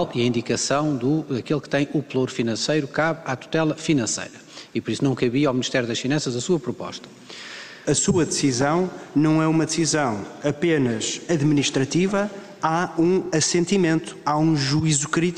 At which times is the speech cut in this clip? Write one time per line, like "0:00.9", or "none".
0:07.8